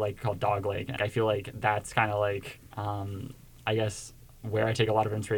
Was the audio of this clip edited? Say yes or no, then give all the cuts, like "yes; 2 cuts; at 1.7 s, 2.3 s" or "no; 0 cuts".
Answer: yes; 2 cuts; at 1.0 s, 2.7 s